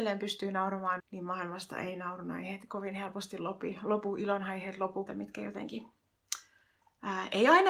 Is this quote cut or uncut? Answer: cut